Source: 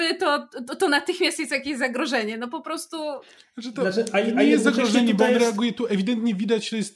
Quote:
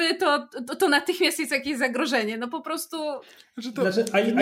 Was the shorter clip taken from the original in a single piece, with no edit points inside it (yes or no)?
yes